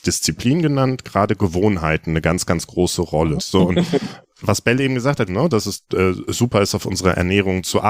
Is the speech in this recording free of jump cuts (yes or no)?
no